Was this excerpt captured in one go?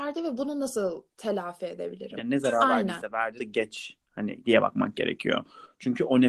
no; 2 cuts; at 2.2 s, 3.4 s

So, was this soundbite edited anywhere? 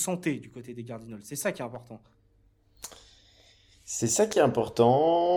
no; 0 cuts

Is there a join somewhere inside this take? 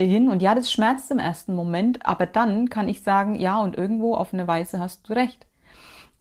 no; 0 cuts

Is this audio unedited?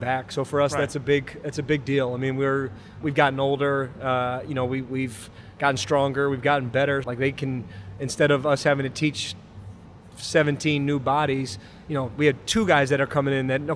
no; 2 cuts; at 3.0 s, 7.0 s

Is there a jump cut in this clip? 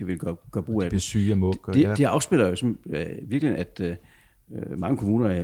no; 0 cuts

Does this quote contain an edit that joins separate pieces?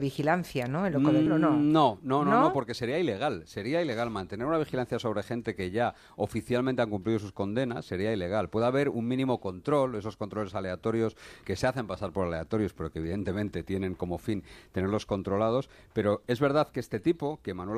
yes; 2 cuts; at 1.3 s, 11.4 s

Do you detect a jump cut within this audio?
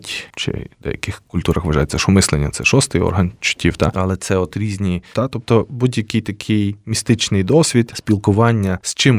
yes; 1 cut; at 5.1 s

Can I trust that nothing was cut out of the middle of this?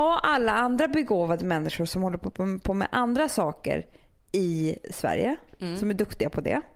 yes; 0 cuts

